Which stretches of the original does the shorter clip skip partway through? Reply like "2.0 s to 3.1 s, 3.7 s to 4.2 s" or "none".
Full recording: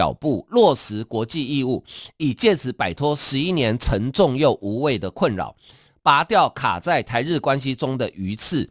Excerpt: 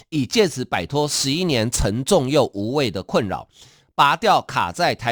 none